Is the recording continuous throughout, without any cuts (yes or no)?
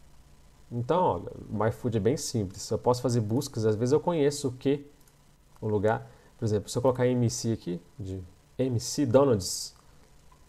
yes